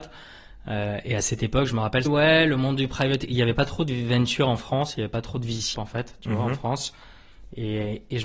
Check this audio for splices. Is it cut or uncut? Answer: cut